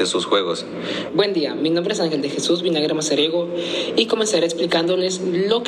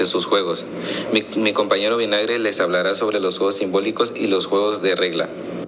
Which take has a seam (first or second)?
first